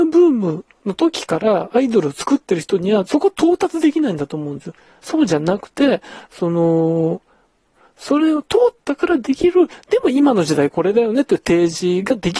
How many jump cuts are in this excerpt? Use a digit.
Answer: 1